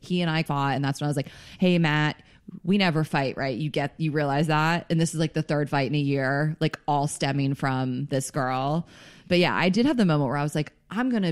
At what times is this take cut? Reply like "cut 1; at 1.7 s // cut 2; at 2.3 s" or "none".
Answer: none